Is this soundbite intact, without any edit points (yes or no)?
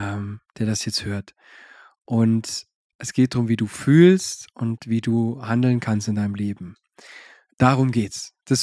yes